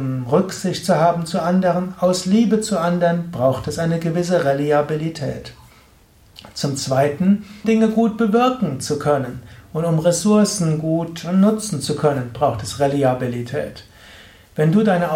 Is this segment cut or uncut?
cut